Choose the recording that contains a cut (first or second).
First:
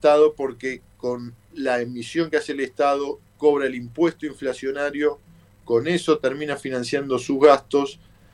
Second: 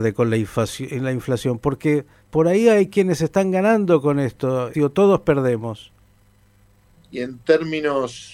second